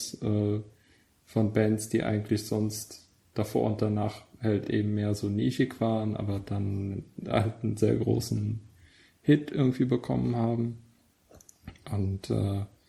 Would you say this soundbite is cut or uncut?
uncut